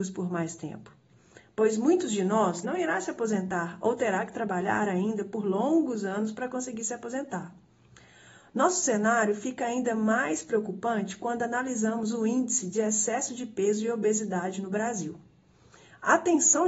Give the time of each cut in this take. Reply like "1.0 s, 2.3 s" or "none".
2.6 s